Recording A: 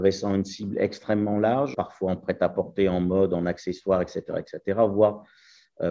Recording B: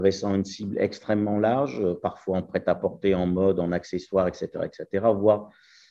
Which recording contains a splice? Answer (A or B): A